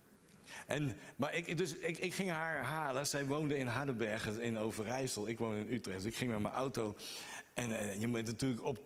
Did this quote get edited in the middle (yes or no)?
yes